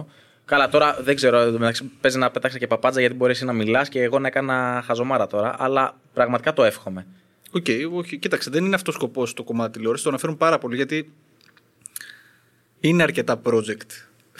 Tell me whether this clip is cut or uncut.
uncut